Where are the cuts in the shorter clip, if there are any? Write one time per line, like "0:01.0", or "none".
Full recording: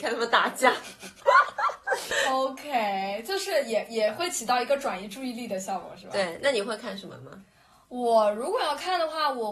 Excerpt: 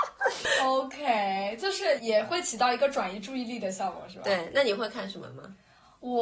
0:02.0